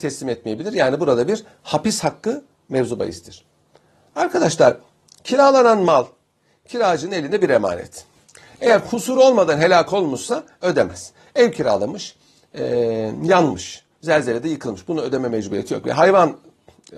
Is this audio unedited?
yes; 0 cuts

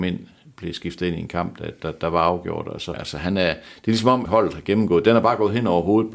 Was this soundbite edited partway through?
yes; 2 cuts; at 2.9 s, 4.2 s

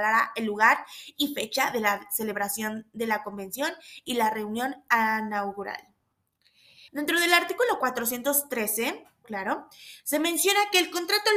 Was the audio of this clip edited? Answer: yes; 2 cuts; at 6.9 s, 9.2 s

